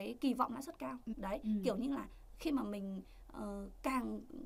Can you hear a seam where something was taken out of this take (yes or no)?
yes